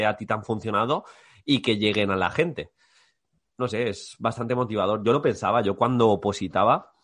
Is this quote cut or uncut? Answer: uncut